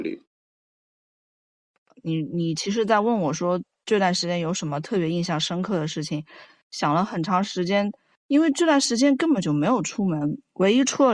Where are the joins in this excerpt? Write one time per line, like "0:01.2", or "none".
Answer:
none